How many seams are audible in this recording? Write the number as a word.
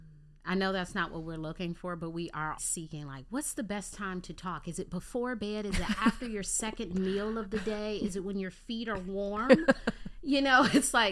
one